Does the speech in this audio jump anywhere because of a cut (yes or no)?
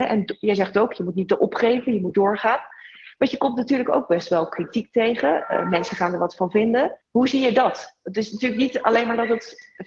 yes